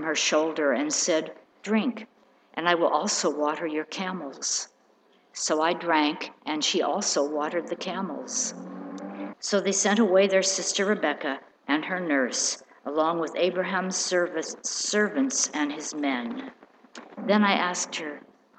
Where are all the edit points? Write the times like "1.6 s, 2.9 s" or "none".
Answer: 9.3 s, 17.2 s